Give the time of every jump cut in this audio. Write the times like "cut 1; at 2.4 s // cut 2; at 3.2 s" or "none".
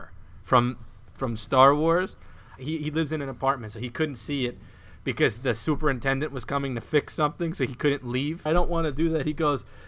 cut 1; at 2.6 s // cut 2; at 8.5 s